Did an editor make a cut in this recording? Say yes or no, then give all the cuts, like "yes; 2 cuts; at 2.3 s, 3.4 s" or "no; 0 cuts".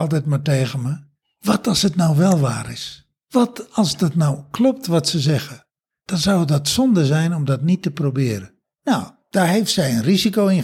no; 0 cuts